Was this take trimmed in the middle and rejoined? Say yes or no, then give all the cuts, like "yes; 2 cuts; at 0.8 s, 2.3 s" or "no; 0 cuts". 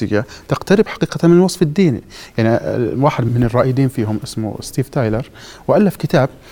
yes; 1 cut; at 3.3 s